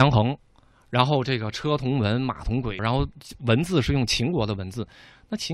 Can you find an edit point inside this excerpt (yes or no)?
yes